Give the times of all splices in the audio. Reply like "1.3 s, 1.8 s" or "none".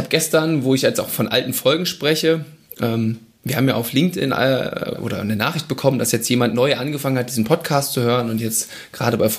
4.9 s

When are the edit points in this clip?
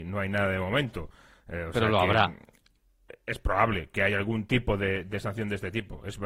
none

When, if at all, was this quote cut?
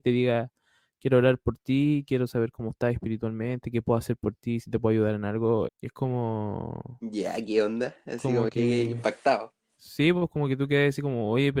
5.6 s

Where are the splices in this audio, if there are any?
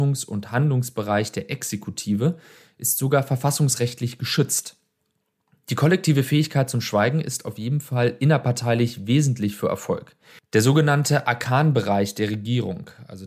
10.4 s

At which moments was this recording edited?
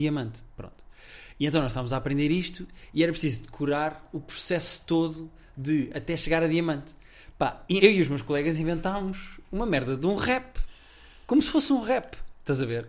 7.8 s

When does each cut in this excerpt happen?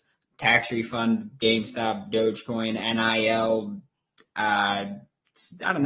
none

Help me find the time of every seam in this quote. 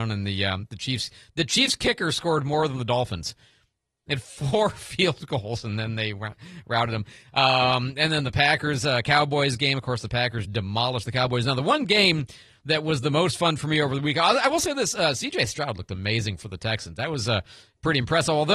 10.4 s

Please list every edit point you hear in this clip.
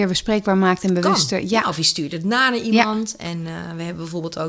none

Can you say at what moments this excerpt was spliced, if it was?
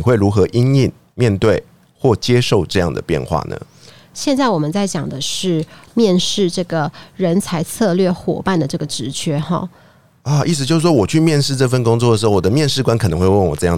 none

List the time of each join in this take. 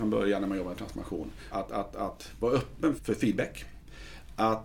1.5 s, 3.0 s

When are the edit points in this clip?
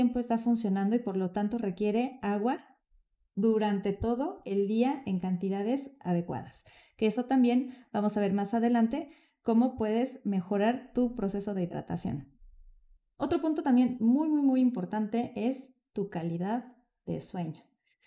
none

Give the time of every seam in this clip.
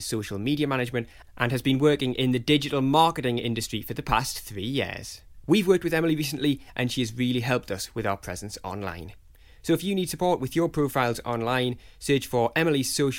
none

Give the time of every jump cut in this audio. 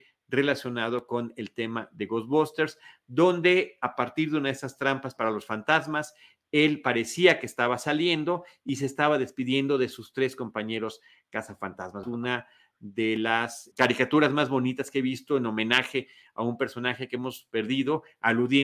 12.0 s, 13.7 s

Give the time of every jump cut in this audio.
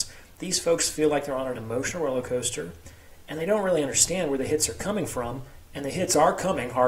none

